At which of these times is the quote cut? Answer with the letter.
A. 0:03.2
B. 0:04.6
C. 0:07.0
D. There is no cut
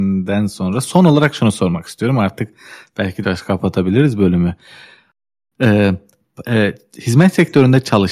A